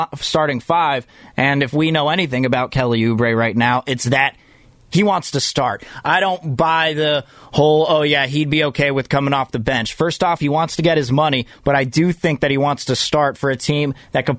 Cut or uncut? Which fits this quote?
uncut